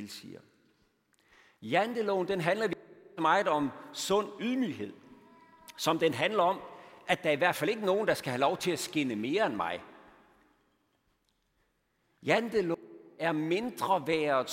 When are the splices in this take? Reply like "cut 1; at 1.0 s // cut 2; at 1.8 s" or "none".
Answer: none